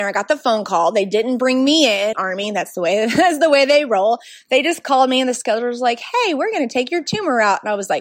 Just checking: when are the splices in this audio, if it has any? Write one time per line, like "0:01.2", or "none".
0:02.1